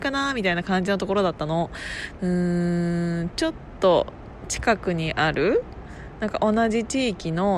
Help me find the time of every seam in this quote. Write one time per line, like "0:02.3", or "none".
0:02.2